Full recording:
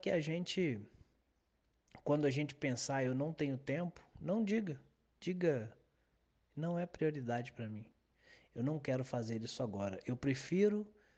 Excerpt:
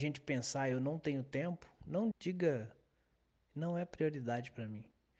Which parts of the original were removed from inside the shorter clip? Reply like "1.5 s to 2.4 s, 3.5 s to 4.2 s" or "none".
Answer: 4.5 s to 5.1 s